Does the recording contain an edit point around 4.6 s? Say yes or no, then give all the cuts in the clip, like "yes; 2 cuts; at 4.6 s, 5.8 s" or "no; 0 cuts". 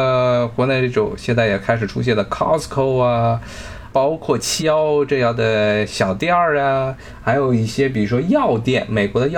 yes; 1 cut; at 4.6 s